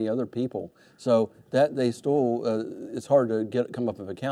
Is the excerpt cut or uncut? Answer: uncut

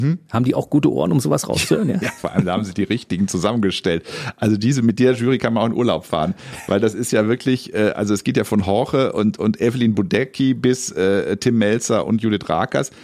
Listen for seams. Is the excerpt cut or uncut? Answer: uncut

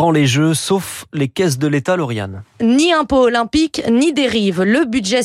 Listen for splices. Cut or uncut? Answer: uncut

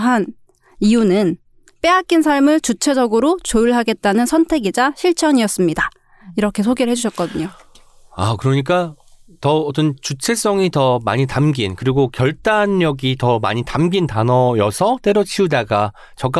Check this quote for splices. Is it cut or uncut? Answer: uncut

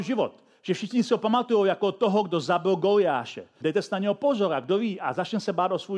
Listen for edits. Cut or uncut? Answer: cut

